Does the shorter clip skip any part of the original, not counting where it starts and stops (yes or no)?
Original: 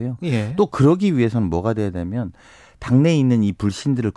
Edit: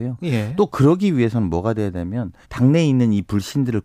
yes